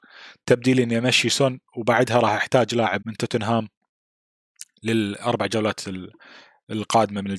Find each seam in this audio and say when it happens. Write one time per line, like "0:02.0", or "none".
0:03.0